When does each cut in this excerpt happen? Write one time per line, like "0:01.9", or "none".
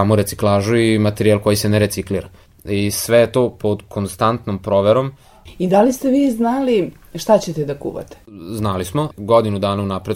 none